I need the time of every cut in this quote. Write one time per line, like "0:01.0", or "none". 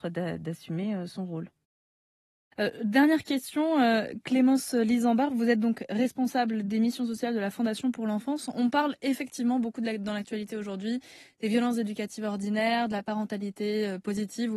none